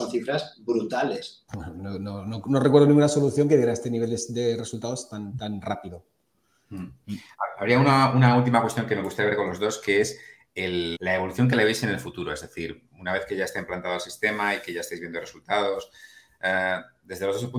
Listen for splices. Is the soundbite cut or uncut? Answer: cut